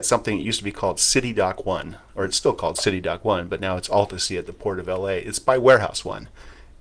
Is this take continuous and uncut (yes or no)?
yes